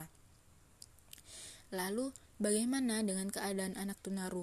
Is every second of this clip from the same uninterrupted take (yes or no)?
yes